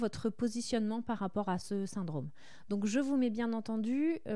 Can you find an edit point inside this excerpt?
no; 0 cuts

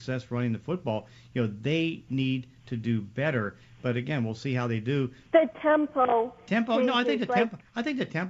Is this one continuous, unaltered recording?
no; 1 cut; at 5.3 s

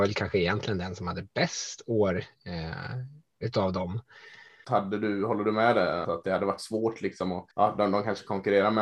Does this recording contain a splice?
yes; 3 cuts; at 4.6 s, 6.0 s, 7.5 s

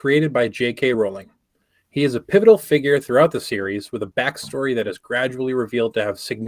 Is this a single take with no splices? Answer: yes; 0 cuts

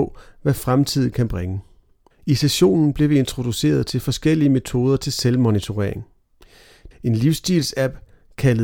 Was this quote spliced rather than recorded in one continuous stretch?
yes; 2 cuts; at 2.1 s, 6.9 s

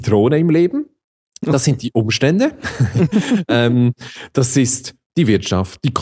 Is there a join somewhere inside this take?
no; 0 cuts

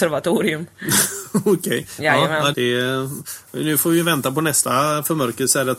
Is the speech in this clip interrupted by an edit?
yes; 1 cut; at 2.5 s

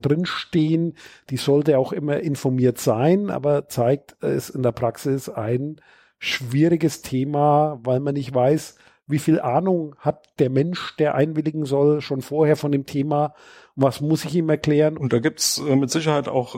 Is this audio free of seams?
no; 1 cut; at 15.0 s

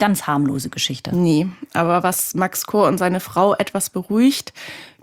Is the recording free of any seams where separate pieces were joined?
yes; 0 cuts

